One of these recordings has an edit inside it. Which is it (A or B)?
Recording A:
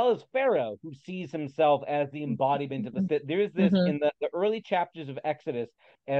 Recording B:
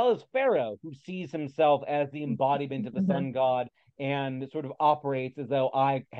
A